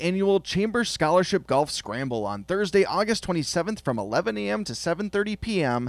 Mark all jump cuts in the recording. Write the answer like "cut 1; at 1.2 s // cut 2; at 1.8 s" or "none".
none